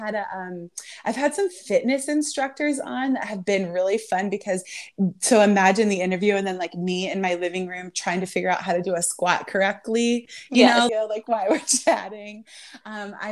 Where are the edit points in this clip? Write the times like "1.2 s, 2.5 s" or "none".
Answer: 10.9 s